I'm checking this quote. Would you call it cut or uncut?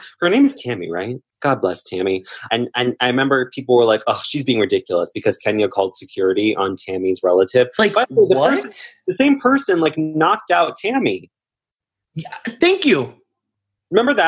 cut